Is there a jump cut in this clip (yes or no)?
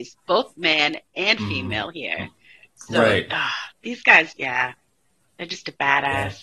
yes